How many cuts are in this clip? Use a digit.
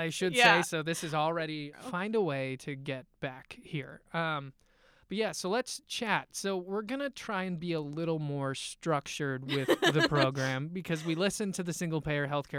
1